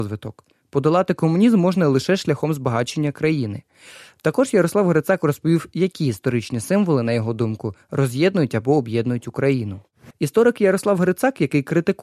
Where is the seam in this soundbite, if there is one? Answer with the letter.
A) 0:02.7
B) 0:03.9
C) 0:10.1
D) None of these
C